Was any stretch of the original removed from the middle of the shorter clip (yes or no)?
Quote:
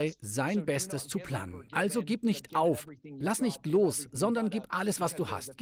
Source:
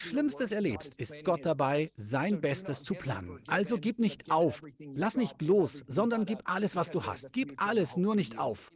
no